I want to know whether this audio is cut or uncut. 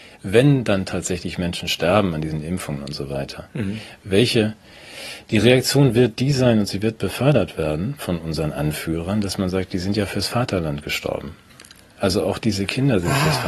uncut